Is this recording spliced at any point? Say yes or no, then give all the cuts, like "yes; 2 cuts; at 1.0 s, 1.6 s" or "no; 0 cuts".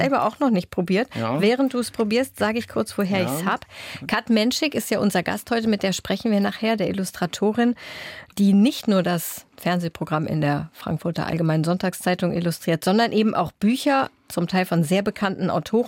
no; 0 cuts